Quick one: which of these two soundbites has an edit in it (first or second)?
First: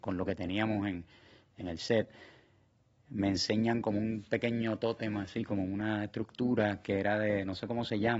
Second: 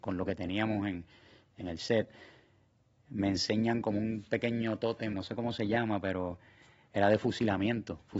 second